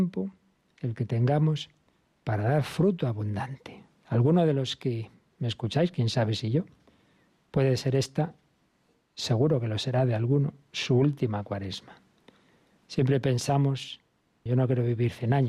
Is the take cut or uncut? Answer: cut